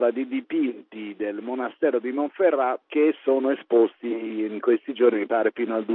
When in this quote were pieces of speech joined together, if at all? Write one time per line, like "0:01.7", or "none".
0:02.8

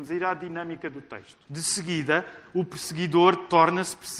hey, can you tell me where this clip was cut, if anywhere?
0:01.4

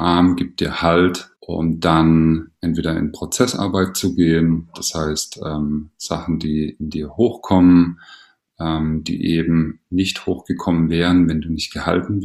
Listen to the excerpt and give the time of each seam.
0:01.3

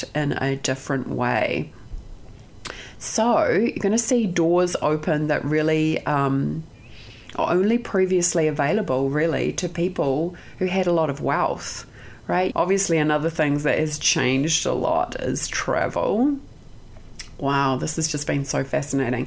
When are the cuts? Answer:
0:12.5

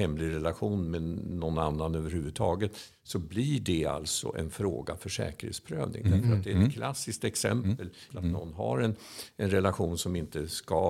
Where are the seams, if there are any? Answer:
0:08.1

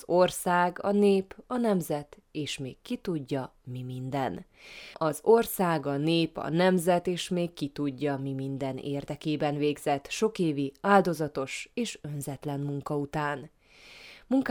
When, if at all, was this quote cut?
0:04.9

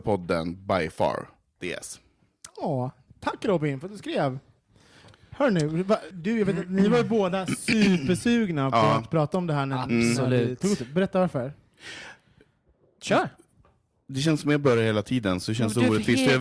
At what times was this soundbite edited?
0:06.1

